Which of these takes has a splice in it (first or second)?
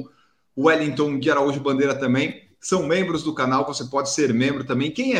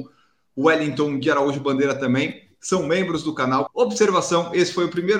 second